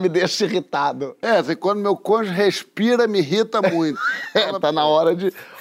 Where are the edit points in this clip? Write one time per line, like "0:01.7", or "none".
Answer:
none